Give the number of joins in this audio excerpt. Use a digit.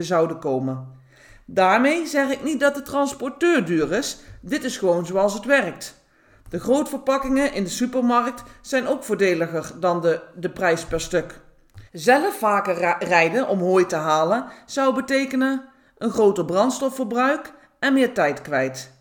1